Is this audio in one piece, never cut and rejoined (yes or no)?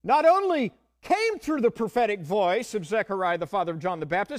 yes